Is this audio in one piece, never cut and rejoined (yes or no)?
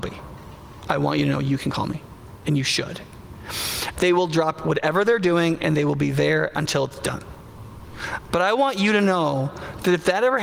no